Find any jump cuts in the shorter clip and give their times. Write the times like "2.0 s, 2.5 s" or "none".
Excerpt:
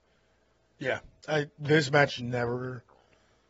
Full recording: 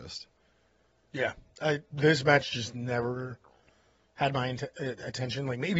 2.2 s